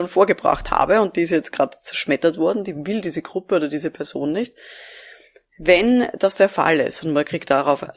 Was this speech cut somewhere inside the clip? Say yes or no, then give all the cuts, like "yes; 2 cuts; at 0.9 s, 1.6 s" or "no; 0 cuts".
no; 0 cuts